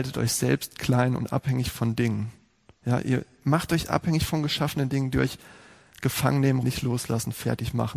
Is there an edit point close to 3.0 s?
no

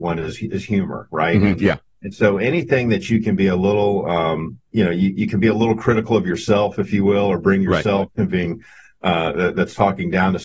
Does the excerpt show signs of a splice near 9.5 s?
no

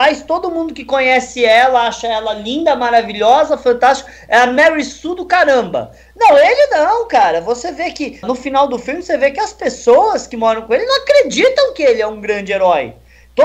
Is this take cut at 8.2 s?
yes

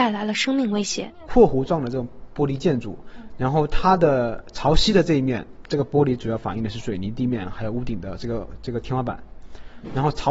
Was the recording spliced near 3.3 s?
no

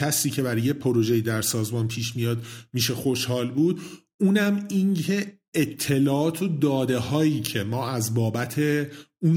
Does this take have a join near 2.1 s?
no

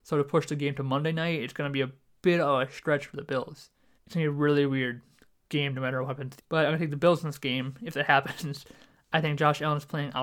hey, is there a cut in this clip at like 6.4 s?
yes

